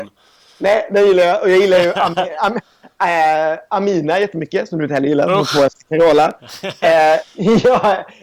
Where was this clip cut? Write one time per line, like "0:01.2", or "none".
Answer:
none